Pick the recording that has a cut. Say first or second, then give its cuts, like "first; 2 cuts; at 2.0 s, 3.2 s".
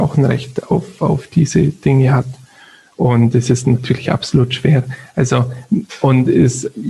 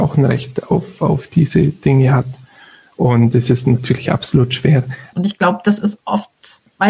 second; 1 cut; at 5.1 s